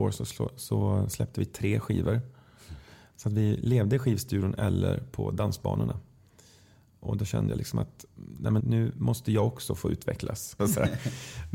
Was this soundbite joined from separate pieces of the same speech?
yes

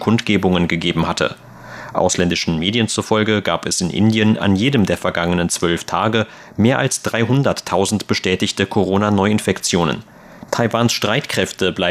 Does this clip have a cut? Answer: yes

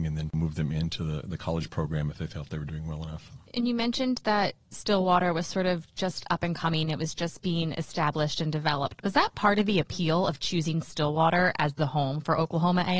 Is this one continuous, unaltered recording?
yes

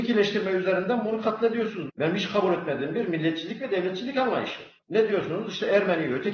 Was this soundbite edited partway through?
yes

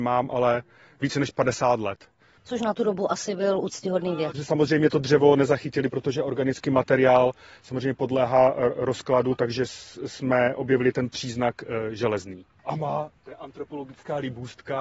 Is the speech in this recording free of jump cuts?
no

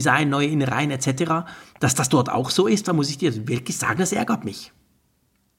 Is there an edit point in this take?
no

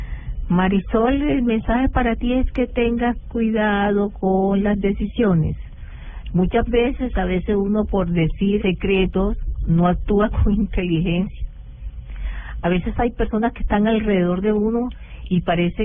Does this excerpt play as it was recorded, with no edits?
no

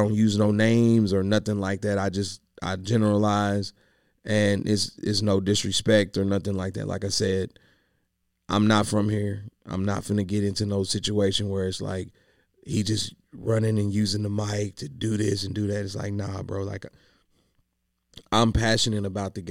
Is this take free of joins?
yes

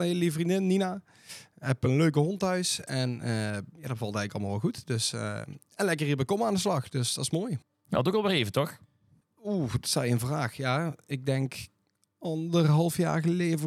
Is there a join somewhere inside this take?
no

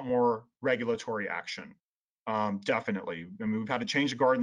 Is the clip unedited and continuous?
yes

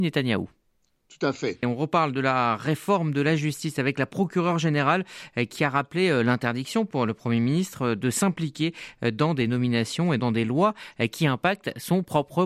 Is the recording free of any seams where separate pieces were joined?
no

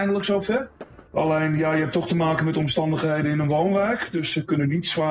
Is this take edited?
yes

